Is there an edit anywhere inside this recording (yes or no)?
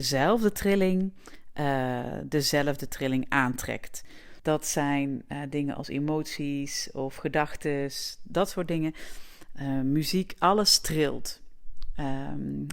yes